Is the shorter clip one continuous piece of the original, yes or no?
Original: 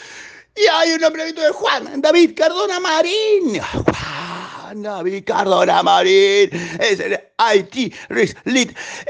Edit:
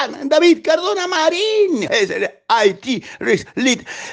no